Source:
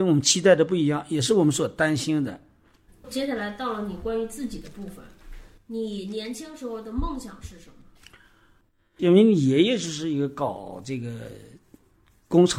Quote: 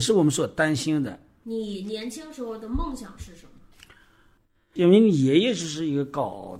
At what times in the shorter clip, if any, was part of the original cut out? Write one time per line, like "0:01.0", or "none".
0:01.4